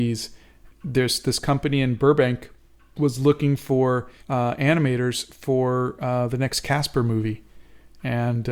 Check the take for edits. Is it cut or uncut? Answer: cut